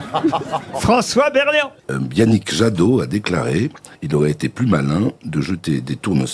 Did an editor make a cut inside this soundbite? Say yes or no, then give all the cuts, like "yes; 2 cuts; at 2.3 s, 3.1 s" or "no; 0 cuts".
yes; 1 cut; at 1.8 s